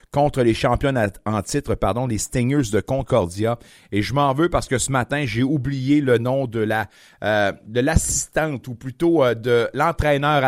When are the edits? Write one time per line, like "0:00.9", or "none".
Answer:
none